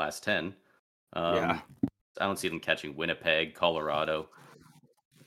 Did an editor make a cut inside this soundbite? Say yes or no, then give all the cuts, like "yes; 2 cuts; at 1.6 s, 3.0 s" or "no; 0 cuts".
yes; 1 cut; at 2.1 s